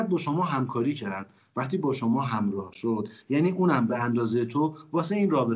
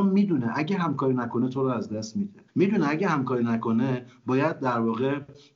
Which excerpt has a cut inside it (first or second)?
second